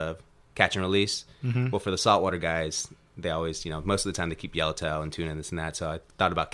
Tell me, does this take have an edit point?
no; 0 cuts

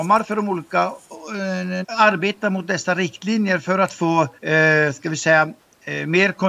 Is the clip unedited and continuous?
no; 2 cuts; at 1.8 s, 4.4 s

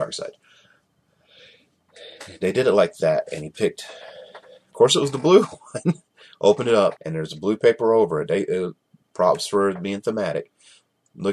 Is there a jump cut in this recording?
yes; 1 cut; at 7.0 s

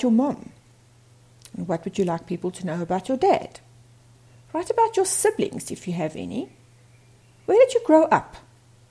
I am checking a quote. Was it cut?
no; 0 cuts

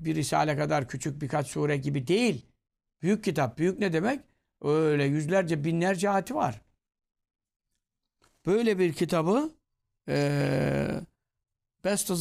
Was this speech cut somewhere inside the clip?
no; 0 cuts

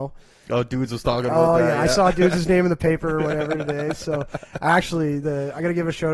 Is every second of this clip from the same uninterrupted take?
yes; 0 cuts

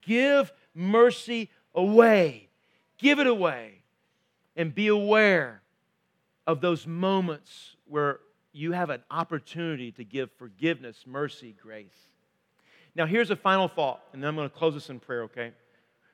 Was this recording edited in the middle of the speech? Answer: no; 0 cuts

